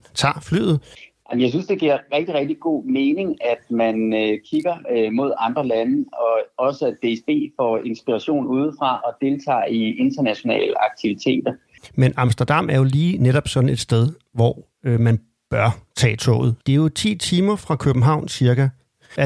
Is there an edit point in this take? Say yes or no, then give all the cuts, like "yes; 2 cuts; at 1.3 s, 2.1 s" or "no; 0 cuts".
no; 0 cuts